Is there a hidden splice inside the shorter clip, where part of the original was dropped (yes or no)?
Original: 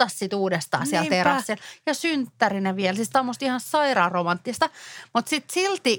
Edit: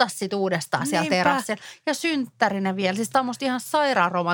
no